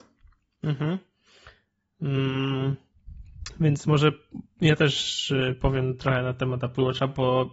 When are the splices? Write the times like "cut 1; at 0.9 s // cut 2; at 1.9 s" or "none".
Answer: none